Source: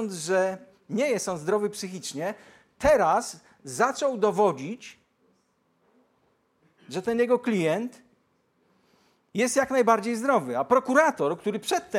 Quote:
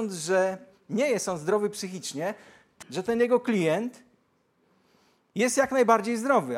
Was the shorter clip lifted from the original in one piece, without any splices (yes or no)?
no